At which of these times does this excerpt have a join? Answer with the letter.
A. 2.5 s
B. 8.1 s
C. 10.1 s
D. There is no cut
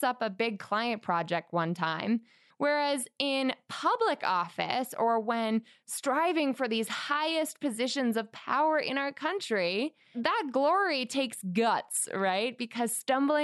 A